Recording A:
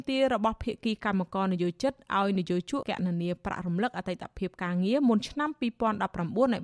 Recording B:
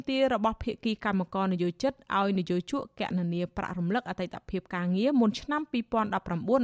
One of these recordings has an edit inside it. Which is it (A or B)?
A